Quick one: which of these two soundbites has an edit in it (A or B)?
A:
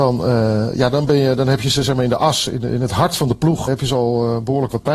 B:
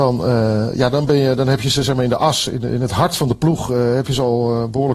A